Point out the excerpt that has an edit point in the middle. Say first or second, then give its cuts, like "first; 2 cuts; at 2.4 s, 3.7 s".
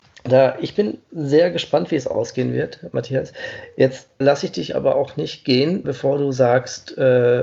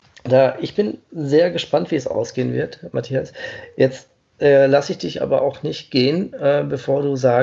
first; 2 cuts; at 4.2 s, 5.8 s